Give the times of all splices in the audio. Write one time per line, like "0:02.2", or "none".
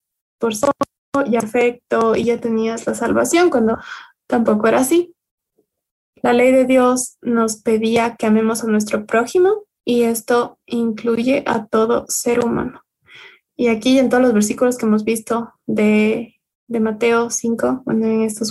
0:06.0